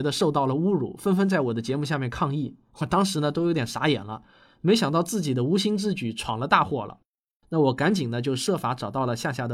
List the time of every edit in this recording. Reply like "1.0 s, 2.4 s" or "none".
none